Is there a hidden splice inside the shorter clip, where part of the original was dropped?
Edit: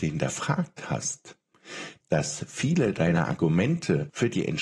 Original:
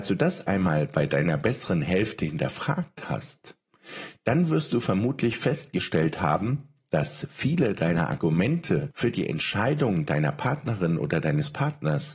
yes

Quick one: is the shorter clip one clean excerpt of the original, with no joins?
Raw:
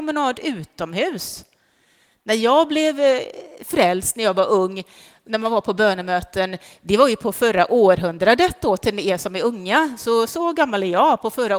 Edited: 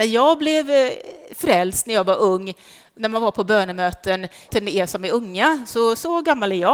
no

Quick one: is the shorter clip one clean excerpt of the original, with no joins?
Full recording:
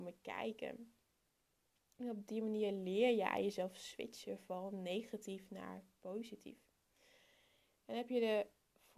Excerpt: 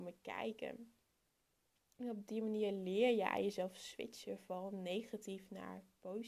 yes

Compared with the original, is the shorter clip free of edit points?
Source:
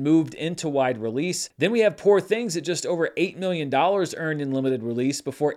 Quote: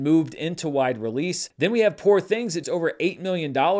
no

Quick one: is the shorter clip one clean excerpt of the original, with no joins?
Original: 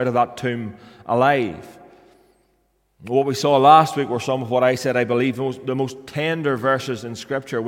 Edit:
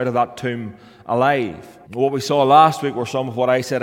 no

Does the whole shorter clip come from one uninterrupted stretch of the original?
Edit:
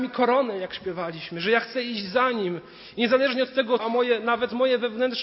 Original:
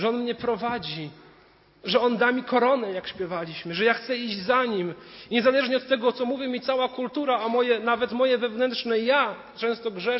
no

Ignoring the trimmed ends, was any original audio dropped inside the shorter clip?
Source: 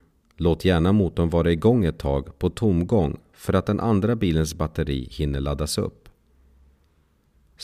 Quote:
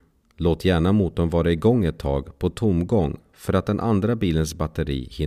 no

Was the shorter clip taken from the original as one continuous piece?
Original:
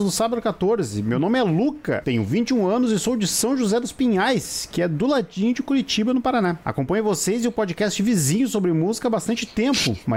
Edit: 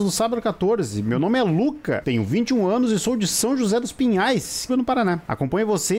no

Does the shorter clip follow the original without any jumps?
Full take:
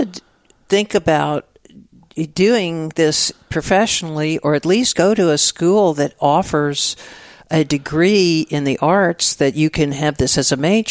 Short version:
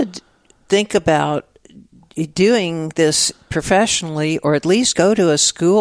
yes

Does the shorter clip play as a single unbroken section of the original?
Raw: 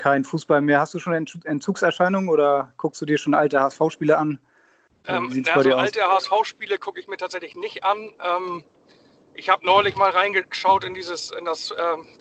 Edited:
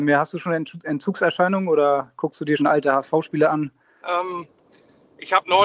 no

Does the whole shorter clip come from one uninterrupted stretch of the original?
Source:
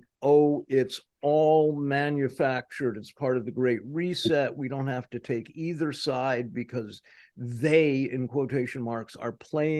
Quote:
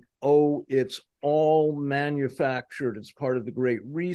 yes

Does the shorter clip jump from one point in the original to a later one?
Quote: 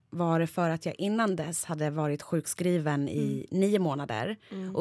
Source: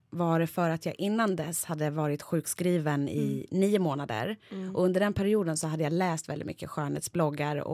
no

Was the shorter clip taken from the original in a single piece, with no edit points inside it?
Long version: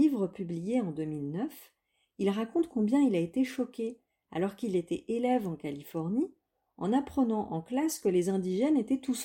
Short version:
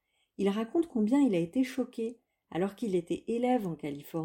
yes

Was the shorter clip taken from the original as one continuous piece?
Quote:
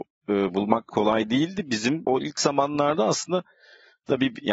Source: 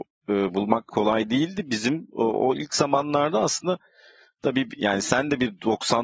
no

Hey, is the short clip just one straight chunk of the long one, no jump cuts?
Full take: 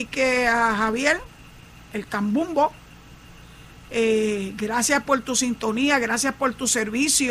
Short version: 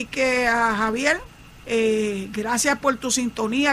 no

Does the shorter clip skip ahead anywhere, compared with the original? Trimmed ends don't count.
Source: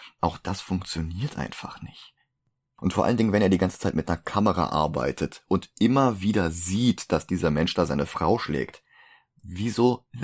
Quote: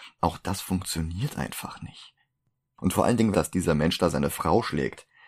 yes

